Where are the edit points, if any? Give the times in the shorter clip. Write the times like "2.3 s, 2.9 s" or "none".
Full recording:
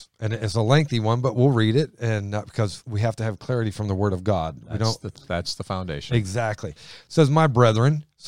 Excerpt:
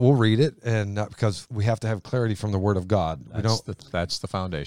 none